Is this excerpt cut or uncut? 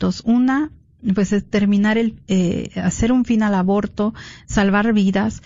uncut